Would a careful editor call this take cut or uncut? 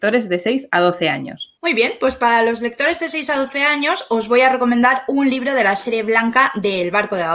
cut